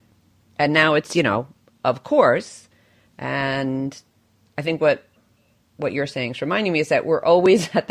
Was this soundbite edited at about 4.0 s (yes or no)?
no